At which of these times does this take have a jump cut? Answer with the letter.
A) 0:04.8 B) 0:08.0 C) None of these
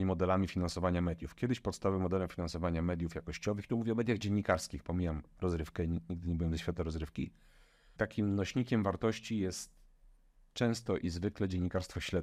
B